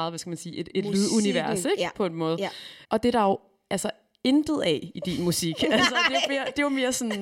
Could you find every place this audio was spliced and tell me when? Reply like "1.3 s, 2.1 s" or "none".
2.8 s